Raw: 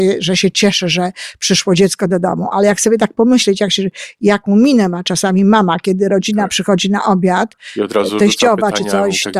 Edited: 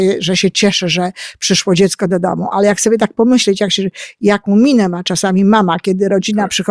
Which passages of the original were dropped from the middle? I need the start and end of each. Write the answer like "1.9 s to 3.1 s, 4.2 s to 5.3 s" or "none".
none